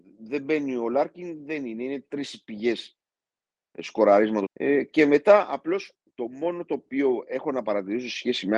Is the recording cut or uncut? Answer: cut